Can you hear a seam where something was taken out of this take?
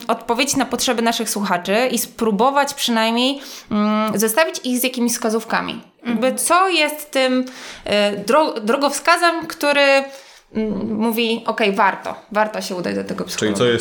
no; 0 cuts

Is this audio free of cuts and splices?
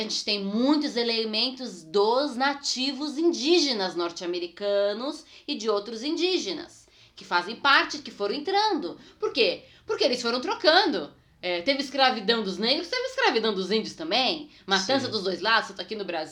yes; 0 cuts

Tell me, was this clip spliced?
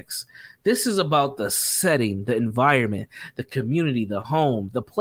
no; 0 cuts

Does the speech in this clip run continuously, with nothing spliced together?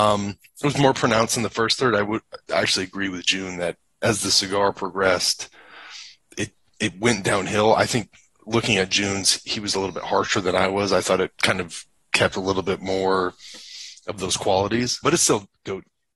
no; 3 cuts; at 6.3 s, 11.3 s, 15.0 s

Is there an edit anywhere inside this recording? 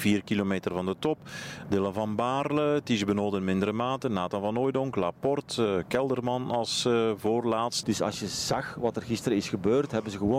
yes; 1 cut; at 7.8 s

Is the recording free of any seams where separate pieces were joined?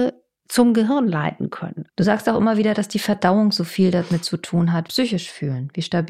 no; 2 cuts; at 1.9 s, 4.9 s

